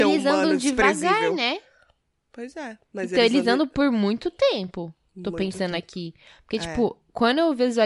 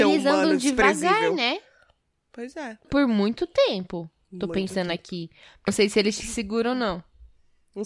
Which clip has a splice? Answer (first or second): second